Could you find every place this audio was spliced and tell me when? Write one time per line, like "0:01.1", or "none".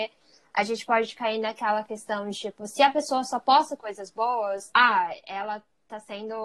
none